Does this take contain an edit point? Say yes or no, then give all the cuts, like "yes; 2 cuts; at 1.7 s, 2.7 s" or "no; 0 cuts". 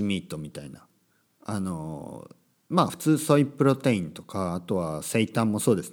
no; 0 cuts